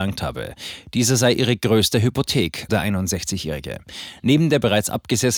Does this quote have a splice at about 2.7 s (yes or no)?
yes